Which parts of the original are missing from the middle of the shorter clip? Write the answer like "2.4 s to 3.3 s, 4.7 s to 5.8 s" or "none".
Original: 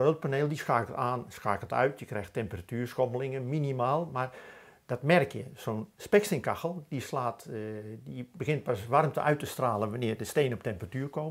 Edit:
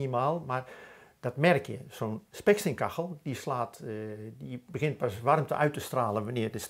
none